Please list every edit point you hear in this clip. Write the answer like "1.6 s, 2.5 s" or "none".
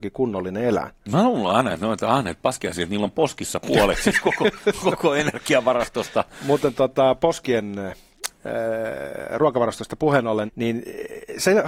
10.5 s